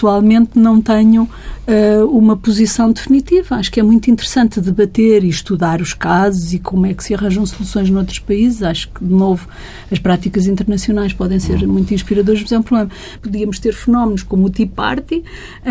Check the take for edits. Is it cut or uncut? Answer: cut